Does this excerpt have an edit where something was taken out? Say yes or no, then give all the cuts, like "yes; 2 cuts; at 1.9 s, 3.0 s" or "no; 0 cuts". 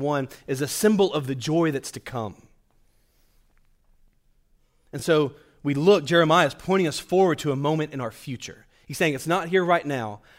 no; 0 cuts